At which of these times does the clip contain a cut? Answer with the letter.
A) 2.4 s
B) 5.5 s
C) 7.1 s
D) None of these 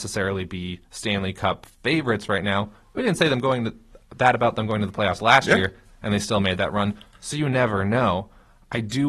D